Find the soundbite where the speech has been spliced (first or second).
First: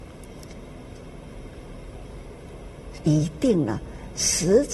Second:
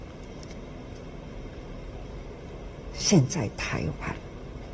first